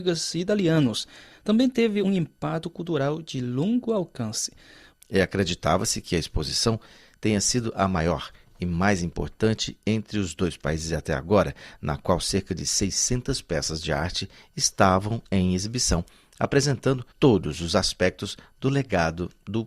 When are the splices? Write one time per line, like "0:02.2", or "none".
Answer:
0:02.0
0:04.9
0:17.1